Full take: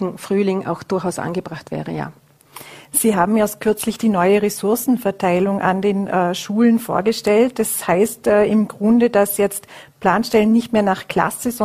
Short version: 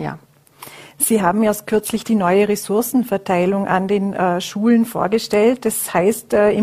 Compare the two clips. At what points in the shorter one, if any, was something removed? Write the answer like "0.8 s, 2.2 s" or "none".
none